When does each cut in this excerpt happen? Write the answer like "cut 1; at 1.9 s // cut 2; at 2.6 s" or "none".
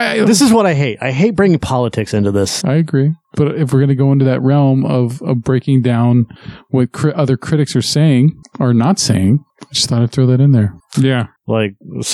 cut 1; at 2.6 s // cut 2; at 10.9 s